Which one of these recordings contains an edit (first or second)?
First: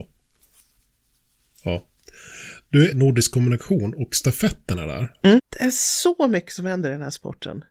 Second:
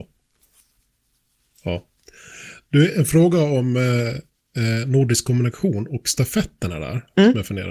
first